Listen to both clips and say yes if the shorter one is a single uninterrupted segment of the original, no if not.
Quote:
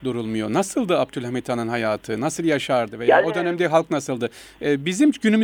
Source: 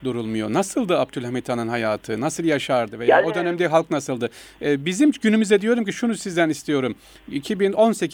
yes